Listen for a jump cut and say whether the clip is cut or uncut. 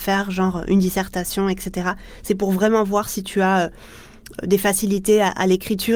uncut